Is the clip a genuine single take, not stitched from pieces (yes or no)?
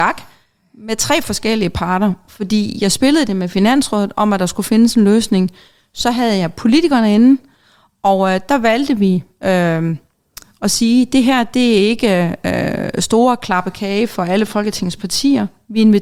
yes